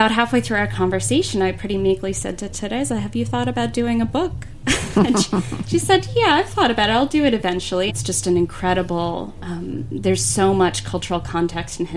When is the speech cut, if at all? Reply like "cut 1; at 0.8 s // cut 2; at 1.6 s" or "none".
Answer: cut 1; at 7.9 s

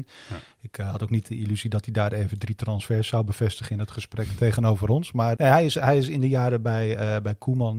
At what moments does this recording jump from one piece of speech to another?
cut 1; at 5.4 s

